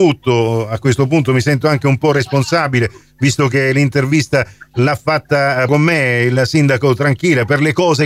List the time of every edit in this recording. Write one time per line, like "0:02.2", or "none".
0:05.7